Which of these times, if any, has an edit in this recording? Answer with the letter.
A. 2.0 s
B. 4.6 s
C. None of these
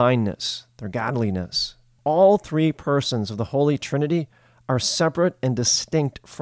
A